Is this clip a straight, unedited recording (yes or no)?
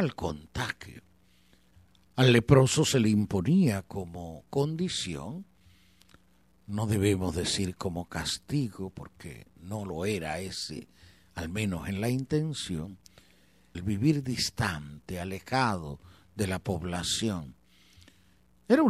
no